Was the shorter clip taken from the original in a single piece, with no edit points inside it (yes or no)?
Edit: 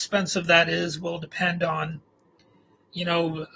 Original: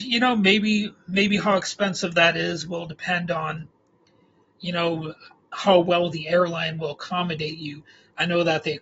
yes